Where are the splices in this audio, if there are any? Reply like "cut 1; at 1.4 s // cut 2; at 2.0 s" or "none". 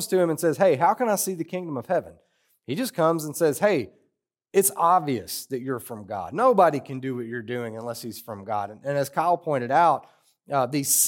none